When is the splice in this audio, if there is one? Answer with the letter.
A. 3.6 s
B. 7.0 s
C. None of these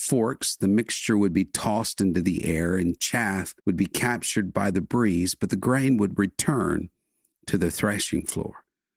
A